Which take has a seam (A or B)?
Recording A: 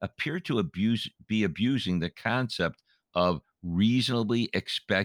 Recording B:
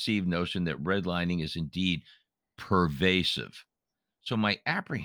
B